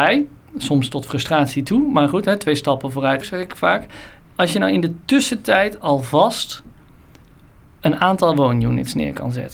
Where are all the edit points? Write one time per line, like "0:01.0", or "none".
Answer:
0:03.2